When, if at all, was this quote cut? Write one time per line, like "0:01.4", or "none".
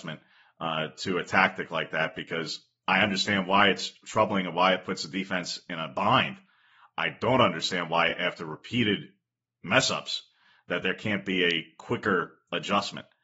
none